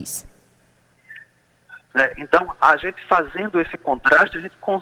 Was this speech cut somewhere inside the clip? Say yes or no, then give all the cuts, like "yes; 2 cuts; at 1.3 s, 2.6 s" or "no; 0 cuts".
yes; 1 cut; at 1.9 s